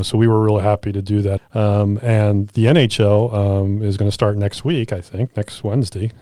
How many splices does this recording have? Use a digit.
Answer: 1